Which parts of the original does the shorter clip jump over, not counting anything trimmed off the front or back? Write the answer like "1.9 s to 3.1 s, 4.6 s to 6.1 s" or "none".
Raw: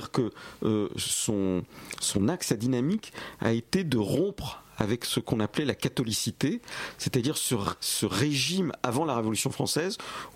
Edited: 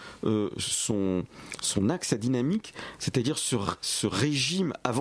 3.4 s to 7.0 s